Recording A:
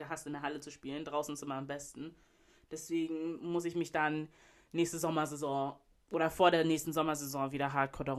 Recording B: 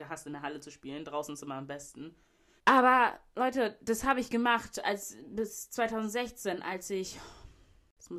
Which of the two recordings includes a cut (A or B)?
B